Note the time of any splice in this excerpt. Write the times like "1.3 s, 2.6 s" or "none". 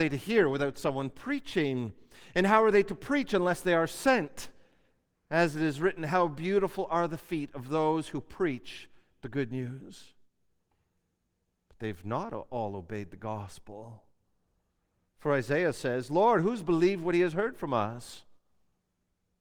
none